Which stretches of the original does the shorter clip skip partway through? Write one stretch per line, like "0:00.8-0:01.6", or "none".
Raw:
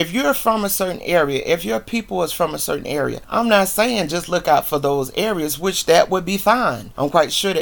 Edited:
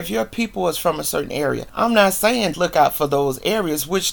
0:04.1-0:04.2